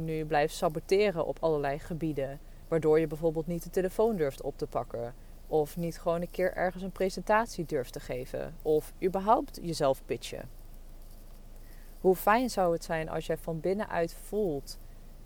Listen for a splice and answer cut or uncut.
uncut